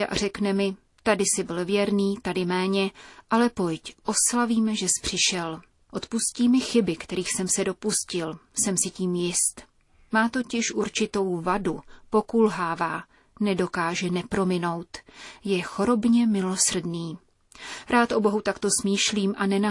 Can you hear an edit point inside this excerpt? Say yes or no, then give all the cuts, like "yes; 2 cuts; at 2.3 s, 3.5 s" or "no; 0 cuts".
no; 0 cuts